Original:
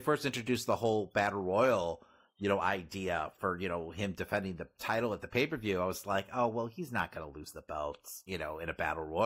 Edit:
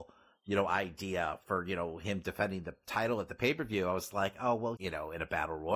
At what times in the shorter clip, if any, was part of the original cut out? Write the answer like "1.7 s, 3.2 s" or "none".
4.8 s